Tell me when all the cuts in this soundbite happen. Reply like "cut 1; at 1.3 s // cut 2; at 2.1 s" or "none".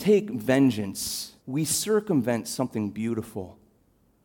cut 1; at 1.4 s